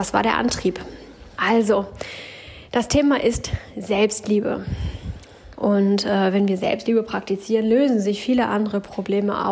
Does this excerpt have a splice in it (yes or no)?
yes